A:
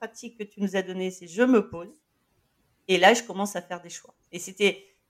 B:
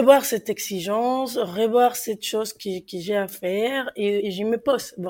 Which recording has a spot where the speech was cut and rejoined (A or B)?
B